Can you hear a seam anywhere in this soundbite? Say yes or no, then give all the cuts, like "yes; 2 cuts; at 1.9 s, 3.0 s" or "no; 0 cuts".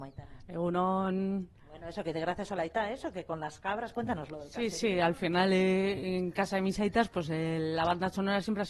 no; 0 cuts